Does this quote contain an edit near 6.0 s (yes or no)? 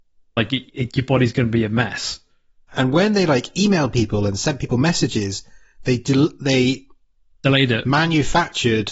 no